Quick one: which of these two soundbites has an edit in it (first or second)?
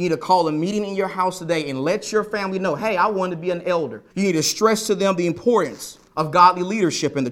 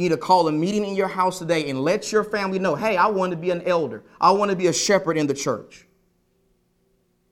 first